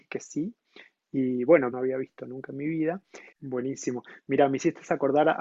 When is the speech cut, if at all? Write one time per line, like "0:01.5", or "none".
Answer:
0:01.7
0:03.3